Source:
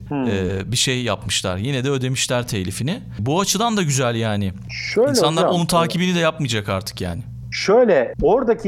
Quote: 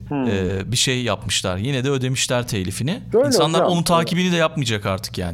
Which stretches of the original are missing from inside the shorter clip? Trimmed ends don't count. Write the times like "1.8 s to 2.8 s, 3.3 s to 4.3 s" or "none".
3.1 s to 4.9 s